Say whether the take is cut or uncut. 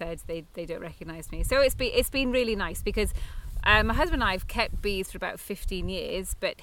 uncut